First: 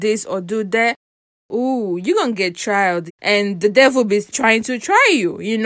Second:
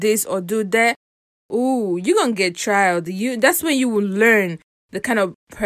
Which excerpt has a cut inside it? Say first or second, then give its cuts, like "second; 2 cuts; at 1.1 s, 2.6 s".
first; 2 cuts; at 3.1 s, 4.3 s